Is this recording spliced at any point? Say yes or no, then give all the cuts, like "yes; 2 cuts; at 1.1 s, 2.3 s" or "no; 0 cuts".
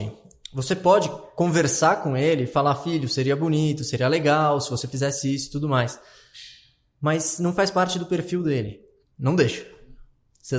yes; 1 cut; at 9.0 s